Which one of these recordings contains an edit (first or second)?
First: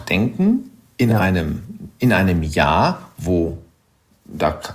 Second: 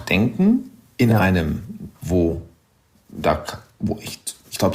second